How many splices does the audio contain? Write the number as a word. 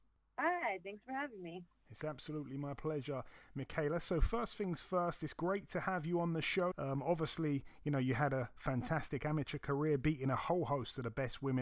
one